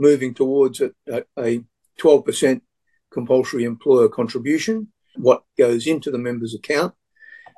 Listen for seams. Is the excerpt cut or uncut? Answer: cut